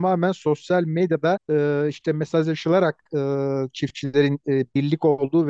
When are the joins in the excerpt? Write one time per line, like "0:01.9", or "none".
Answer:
0:01.4

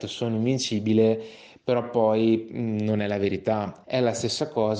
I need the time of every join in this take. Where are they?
0:03.8

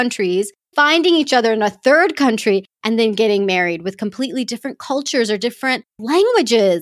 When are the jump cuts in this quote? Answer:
none

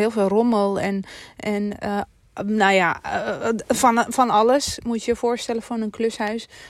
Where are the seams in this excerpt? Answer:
none

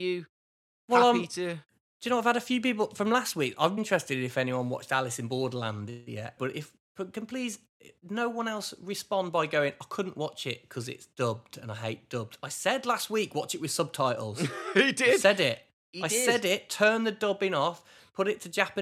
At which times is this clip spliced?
0:03.8
0:06.4

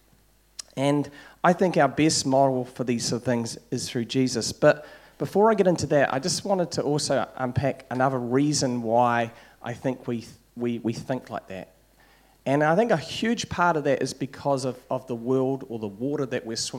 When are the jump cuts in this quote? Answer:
none

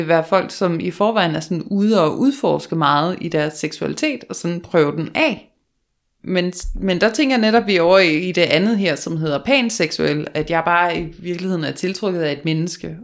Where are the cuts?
0:06.2

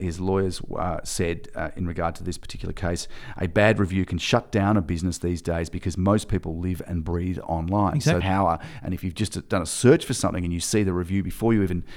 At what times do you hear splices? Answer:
0:08.2

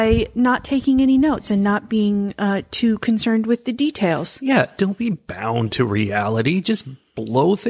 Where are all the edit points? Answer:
none

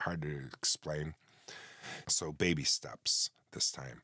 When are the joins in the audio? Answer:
0:02.0

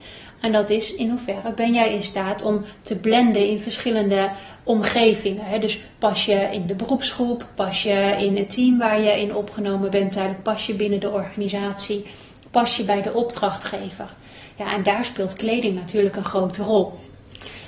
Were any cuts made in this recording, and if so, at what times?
none

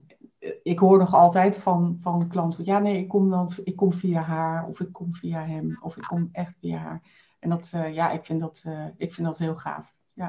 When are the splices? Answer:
none

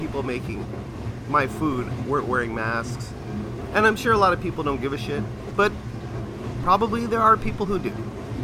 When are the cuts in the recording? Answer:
0:05.5

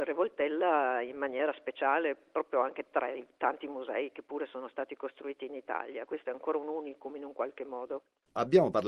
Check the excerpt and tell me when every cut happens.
none

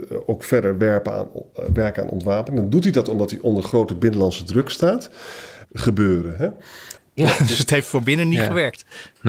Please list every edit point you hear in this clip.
0:05.6
0:07.0

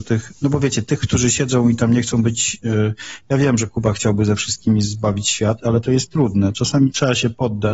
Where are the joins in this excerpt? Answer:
none

